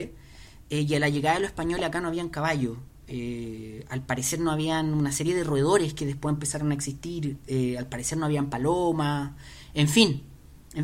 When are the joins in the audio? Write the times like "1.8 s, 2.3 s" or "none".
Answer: none